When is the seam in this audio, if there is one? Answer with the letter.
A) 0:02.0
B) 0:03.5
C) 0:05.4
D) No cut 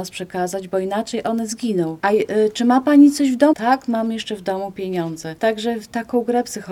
B